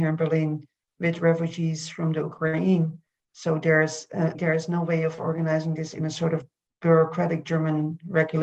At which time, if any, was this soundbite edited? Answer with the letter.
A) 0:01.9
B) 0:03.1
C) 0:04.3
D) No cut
C